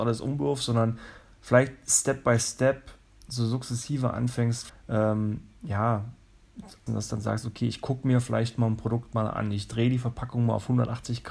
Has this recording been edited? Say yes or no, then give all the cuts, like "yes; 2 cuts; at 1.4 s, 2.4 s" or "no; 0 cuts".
yes; 2 cuts; at 4.7 s, 6.9 s